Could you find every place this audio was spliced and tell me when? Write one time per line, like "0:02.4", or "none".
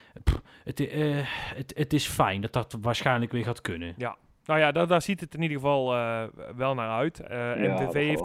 0:01.7